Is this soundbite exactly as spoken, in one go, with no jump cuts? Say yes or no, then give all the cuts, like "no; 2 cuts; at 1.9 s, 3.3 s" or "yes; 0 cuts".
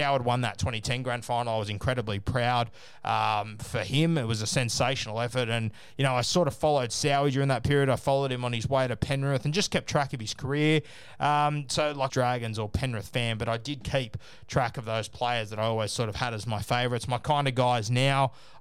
no; 1 cut; at 12.1 s